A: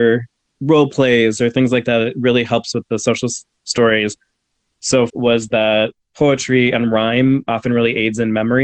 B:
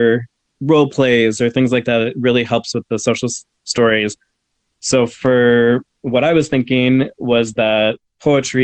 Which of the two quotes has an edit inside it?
A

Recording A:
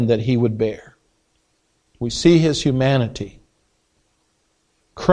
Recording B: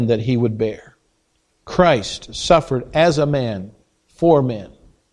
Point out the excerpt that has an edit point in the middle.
B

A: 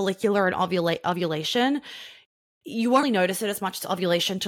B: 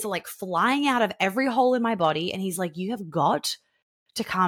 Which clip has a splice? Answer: A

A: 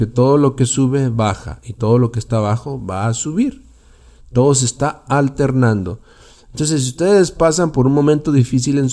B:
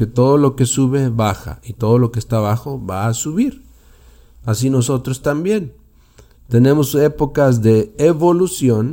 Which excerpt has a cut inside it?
A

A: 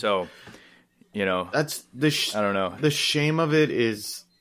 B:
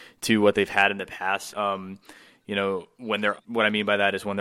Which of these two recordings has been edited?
B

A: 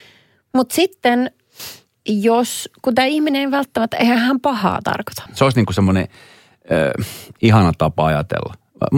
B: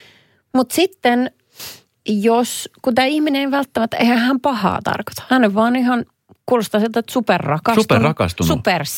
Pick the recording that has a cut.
A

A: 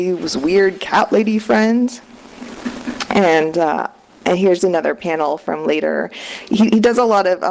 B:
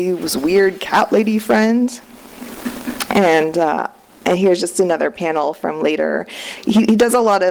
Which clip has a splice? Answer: A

